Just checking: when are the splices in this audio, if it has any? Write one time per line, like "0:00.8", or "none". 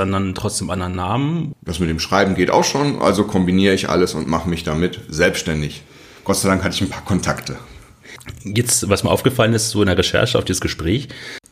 0:01.5